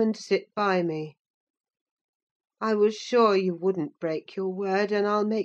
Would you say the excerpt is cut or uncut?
uncut